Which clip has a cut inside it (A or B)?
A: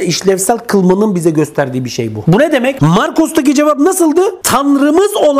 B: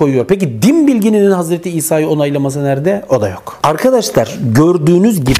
A